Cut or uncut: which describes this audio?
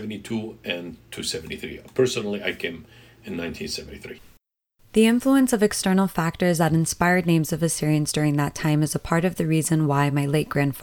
uncut